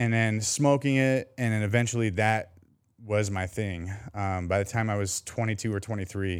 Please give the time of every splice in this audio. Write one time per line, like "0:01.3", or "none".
none